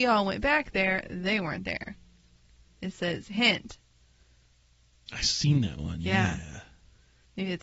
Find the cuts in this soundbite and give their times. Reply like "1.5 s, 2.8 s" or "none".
2.6 s, 5.1 s